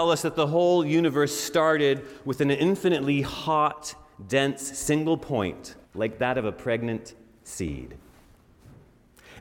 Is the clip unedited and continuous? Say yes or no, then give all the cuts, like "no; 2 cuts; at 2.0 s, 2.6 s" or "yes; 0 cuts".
no; 1 cut; at 5.8 s